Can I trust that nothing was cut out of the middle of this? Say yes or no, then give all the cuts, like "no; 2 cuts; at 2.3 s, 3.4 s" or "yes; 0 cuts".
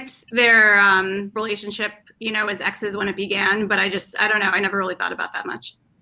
yes; 0 cuts